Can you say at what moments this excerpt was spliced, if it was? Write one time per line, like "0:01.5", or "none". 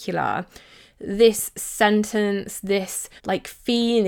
0:03.2